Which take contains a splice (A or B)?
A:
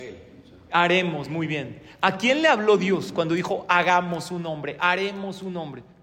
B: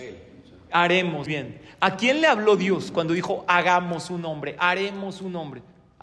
B